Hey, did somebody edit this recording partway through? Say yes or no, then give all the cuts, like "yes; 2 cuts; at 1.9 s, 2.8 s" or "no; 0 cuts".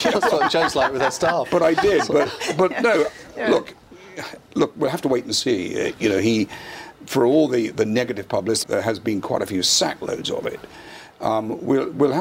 yes; 1 cut; at 8.6 s